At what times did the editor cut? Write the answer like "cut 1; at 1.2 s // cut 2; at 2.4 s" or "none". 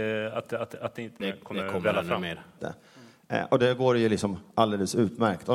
cut 1; at 1.2 s // cut 2; at 2.6 s